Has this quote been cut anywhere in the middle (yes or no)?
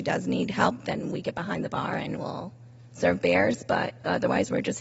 no